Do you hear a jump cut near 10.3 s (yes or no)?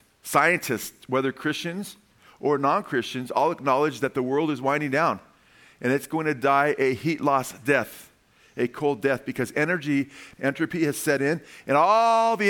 yes